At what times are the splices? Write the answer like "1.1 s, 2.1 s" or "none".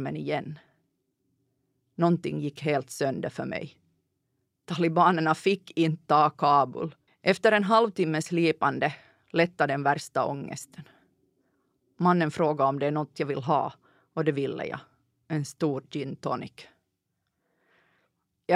7.1 s